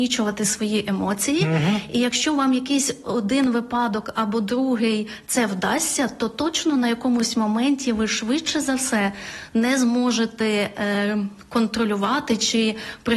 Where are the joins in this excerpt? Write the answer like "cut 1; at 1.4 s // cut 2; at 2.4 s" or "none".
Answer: none